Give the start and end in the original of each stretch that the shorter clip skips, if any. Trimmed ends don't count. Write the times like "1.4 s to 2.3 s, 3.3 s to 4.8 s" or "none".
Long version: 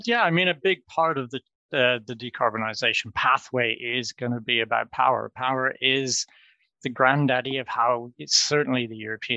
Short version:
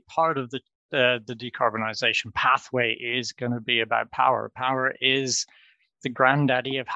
none